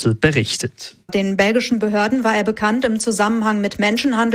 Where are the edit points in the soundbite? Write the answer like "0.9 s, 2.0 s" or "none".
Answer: 1.1 s